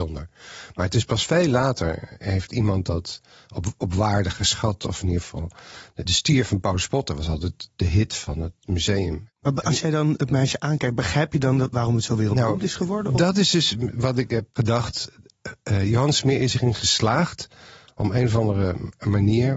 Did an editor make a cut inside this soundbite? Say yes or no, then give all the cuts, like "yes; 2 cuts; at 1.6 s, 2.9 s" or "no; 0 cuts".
no; 0 cuts